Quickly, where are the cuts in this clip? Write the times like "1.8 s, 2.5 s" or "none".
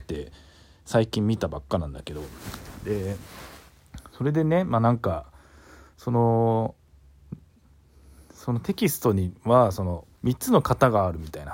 10.1 s